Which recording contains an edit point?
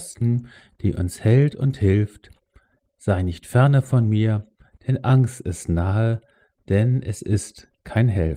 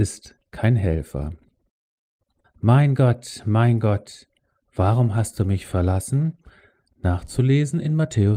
second; 1 cut; at 2.4 s

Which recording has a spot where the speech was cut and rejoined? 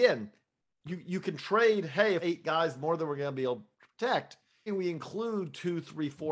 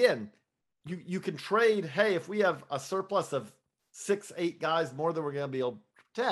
first; 2 cuts; at 2.2 s, 4.7 s

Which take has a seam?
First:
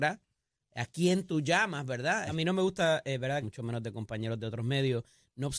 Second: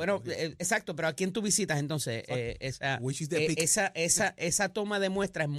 first; 2 cuts; at 2.3 s, 3.4 s

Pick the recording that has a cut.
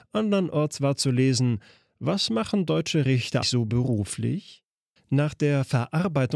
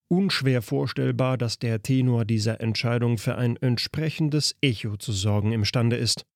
first; 2 cuts; at 3.4 s, 5.0 s

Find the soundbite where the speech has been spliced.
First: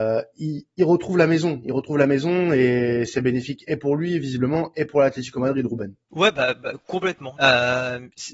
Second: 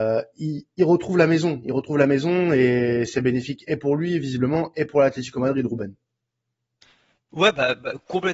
first; 2 cuts; at 6.0 s, 7.4 s

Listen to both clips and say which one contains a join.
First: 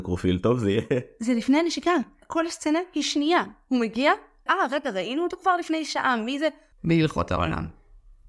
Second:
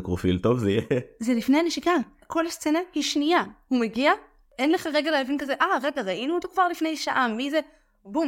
first; 2 cuts; at 4.5 s, 6.7 s

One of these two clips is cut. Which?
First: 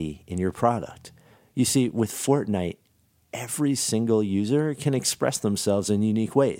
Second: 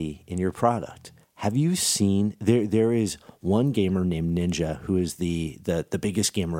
second; 1 cut; at 1.2 s

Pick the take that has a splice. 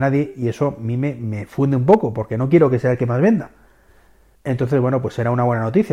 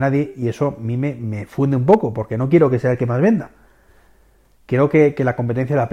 first; 1 cut; at 4.4 s

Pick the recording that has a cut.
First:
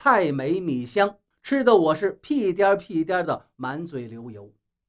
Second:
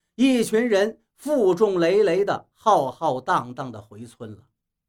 first; 2 cuts; at 1.3 s, 3.5 s

